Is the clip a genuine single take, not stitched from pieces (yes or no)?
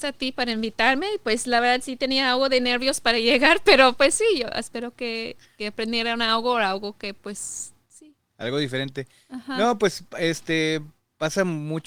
yes